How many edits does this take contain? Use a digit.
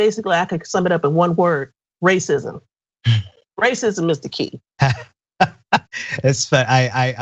1